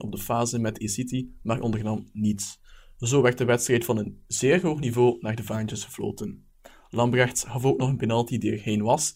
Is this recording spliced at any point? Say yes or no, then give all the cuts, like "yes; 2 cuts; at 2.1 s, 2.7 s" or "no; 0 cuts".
no; 0 cuts